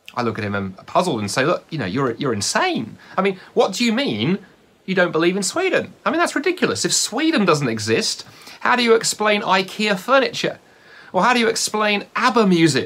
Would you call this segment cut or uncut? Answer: uncut